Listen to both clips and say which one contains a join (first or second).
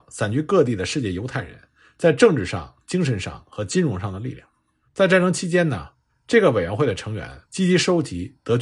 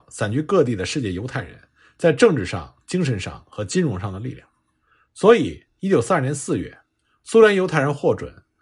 first